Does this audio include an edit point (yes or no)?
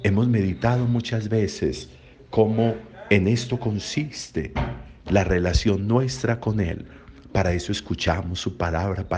yes